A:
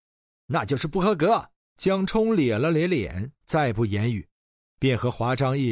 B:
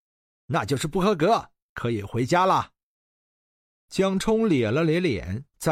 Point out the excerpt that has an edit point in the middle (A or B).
A